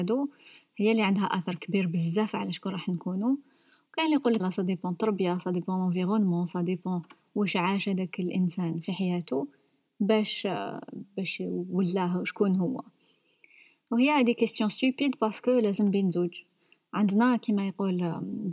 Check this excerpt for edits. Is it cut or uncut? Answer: cut